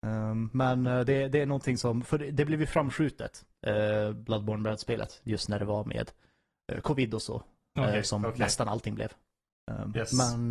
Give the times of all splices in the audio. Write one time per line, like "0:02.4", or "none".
none